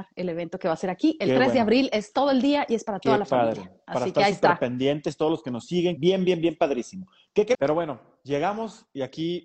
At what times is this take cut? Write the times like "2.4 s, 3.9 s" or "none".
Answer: 6.0 s, 7.5 s